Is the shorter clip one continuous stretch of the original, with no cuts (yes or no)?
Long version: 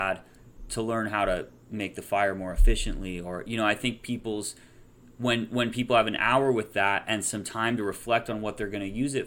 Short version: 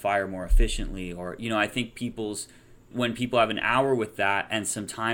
no